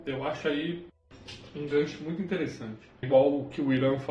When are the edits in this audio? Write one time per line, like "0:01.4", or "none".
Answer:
0:03.0